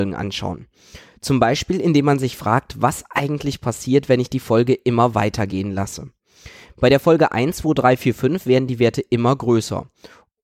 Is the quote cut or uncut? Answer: uncut